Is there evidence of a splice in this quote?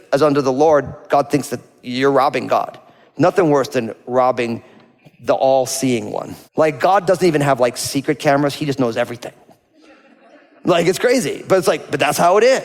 yes; 1 cut; at 6.4 s

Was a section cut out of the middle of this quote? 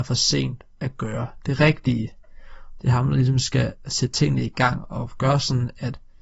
yes; 1 cut; at 2.8 s

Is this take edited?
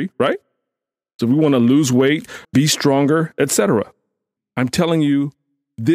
yes; 3 cuts; at 1.2 s, 2.4 s, 4.4 s

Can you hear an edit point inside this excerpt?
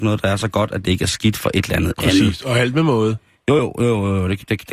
no; 0 cuts

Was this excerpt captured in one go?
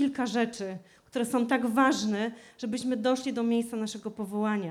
yes; 0 cuts

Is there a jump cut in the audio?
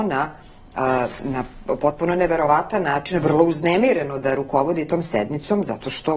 yes; 1 cut; at 1.2 s

